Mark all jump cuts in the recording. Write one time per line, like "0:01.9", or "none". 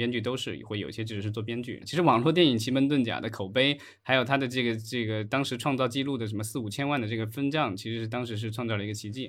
0:01.8